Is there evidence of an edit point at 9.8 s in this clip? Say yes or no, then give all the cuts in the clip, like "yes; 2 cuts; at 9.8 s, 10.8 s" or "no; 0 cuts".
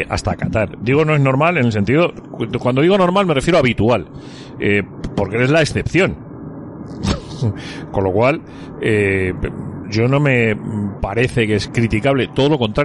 yes; 2 cuts; at 9.8 s, 11.7 s